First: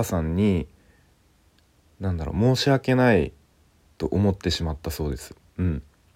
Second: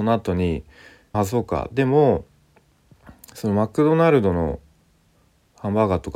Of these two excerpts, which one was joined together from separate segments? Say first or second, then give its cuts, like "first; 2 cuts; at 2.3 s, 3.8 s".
second; 1 cut; at 1.1 s